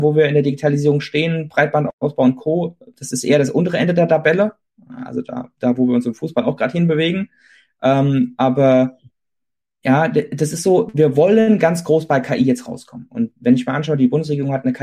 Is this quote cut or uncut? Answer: uncut